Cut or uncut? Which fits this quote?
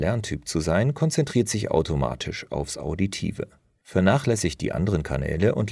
uncut